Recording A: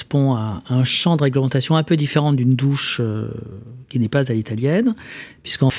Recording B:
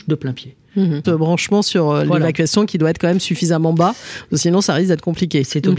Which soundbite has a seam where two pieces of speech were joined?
B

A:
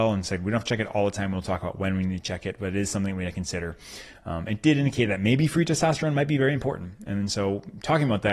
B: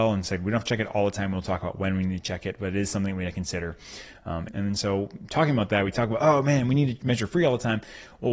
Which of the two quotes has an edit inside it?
B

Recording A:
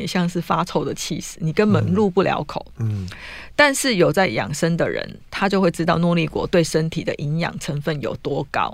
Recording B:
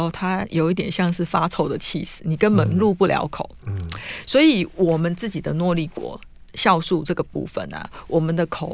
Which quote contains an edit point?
B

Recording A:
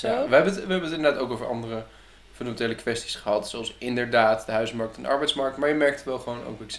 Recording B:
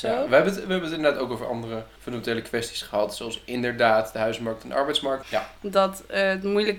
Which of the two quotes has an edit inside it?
B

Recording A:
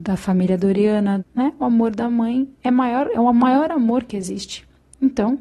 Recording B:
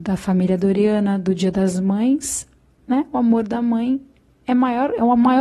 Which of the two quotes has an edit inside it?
A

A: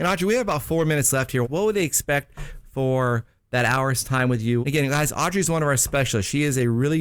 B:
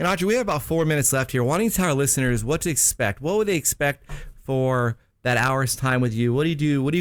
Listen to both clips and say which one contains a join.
A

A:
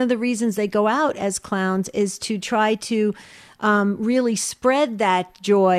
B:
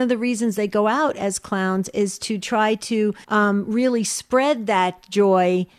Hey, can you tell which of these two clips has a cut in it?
B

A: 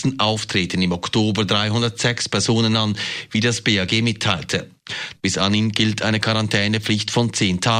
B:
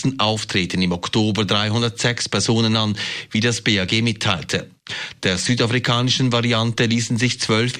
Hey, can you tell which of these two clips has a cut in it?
A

